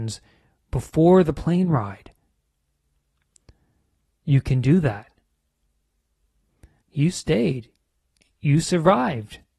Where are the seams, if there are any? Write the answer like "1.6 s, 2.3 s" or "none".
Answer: 6.8 s